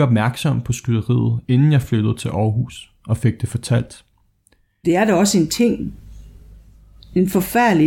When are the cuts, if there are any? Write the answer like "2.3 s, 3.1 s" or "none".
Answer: 4.8 s